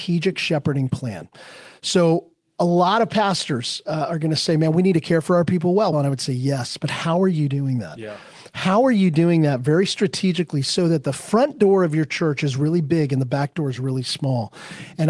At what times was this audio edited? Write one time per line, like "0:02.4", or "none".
0:05.9